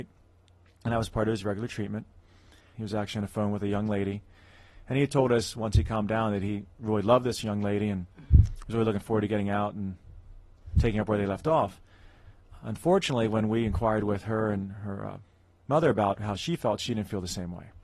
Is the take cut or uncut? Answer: cut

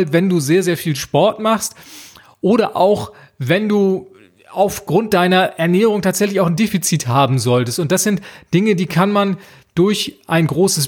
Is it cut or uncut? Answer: uncut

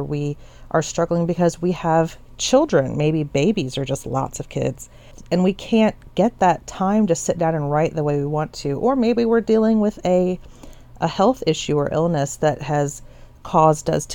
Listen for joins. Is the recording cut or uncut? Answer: uncut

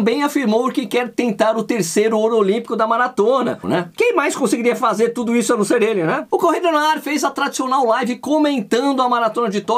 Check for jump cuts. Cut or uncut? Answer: cut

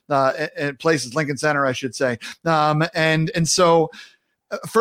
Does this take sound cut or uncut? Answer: uncut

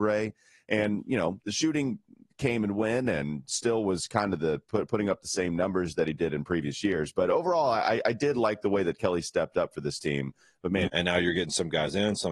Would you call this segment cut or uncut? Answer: cut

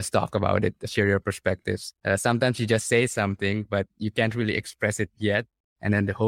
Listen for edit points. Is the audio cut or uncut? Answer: cut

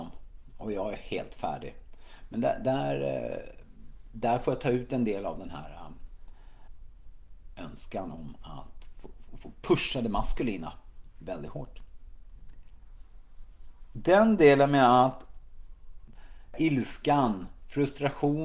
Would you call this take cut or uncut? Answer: uncut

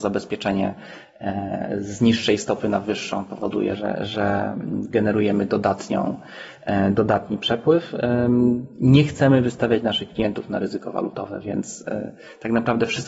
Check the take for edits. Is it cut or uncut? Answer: cut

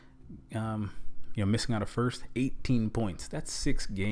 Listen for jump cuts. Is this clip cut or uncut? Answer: uncut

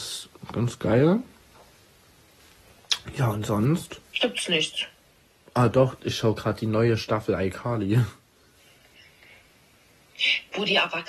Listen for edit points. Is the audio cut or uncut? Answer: cut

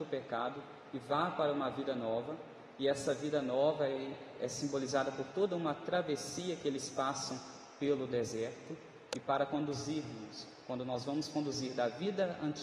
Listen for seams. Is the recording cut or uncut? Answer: uncut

